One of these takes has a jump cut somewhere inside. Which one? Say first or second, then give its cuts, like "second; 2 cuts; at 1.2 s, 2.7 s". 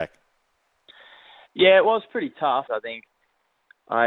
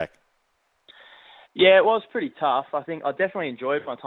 first; 1 cut; at 2.7 s